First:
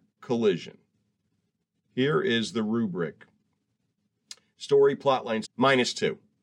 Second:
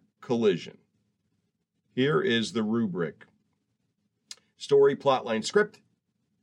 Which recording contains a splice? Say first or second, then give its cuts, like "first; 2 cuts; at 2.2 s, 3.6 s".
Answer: first; 1 cut; at 5.4 s